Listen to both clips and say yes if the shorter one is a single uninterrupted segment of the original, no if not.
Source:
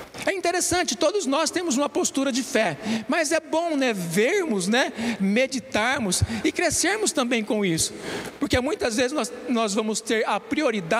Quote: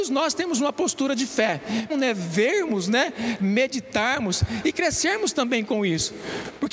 no